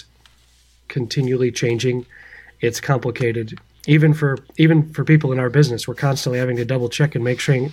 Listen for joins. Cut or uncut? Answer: uncut